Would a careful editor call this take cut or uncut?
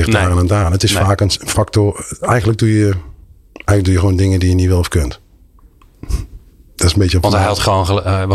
uncut